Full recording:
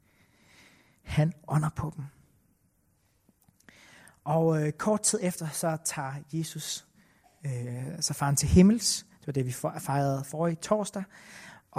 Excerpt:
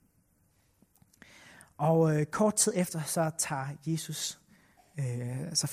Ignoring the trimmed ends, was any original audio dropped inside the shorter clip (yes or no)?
no